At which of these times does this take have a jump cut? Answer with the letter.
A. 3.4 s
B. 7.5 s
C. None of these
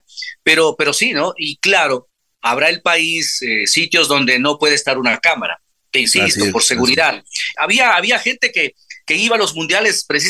B